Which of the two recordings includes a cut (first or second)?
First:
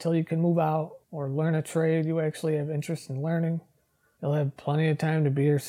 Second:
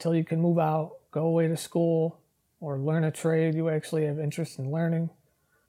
first